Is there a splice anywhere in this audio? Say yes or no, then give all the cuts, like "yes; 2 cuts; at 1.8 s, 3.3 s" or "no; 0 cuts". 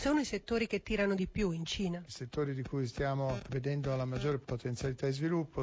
no; 0 cuts